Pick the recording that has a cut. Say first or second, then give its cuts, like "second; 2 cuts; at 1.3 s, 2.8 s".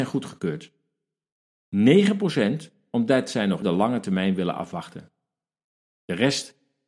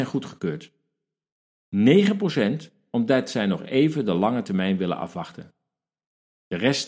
first; 1 cut; at 3.6 s